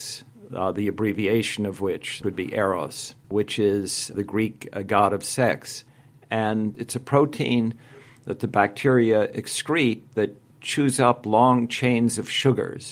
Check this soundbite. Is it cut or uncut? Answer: uncut